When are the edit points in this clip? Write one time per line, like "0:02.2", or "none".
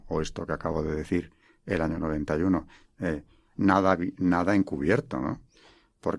0:02.8